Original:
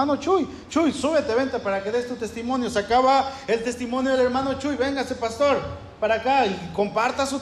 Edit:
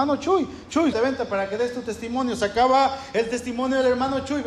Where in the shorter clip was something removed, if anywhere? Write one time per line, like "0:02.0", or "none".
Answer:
0:00.9

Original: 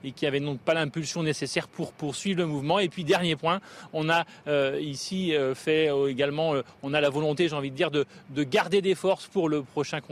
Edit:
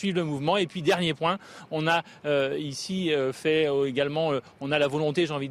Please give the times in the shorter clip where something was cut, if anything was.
none

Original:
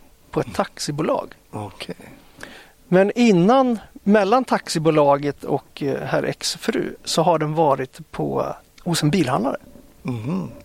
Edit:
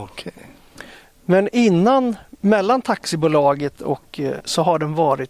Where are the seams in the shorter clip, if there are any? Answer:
0:04.4

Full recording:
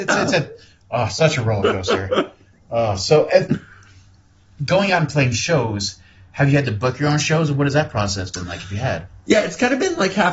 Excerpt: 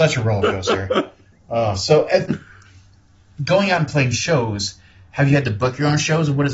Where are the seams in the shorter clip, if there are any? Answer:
none

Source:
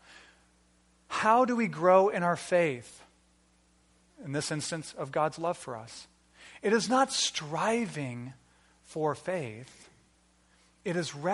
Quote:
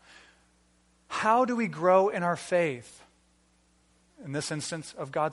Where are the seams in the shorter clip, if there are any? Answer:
none

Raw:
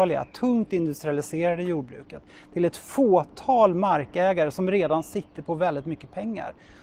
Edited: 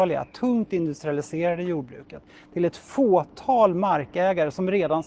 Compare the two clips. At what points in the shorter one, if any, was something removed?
none

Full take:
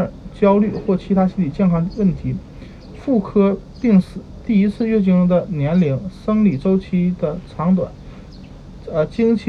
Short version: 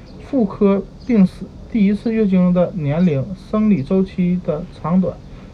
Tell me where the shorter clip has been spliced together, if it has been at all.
none

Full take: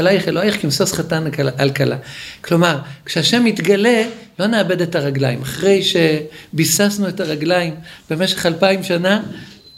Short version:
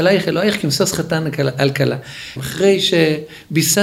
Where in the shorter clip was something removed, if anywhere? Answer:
0:02.4

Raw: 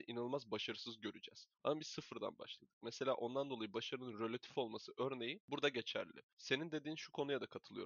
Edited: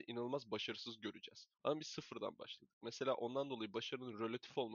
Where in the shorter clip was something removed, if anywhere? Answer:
none

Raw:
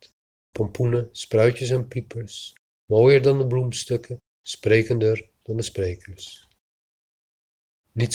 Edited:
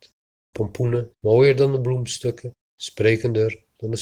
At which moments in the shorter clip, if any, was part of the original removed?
0:01.1

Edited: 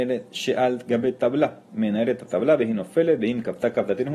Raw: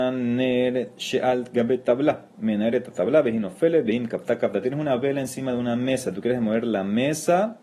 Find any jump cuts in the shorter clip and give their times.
none

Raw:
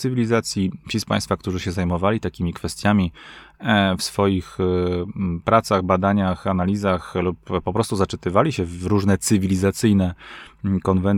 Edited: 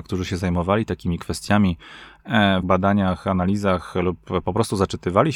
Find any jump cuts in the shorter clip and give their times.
0:02.6

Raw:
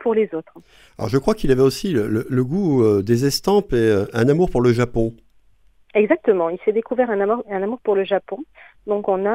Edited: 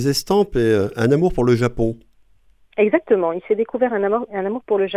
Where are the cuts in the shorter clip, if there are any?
none

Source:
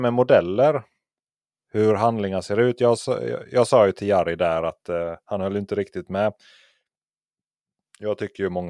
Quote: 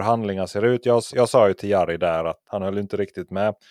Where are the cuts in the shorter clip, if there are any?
0:01.1
0:02.4

